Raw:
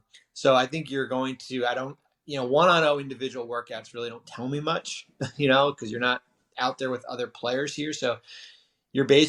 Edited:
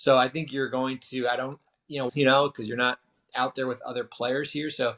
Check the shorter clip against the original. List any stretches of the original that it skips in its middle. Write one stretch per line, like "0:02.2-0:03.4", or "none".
0:02.5-0:05.3